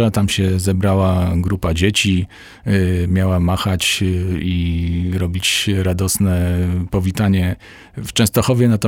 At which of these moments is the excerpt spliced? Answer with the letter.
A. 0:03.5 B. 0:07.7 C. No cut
C